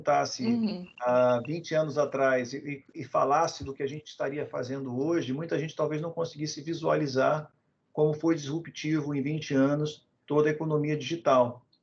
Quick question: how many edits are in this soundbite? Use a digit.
0